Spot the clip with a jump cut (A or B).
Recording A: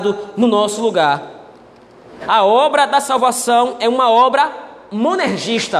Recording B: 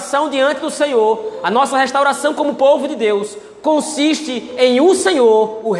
A